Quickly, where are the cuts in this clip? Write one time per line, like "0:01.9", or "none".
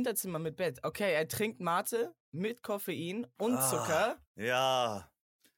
0:04.3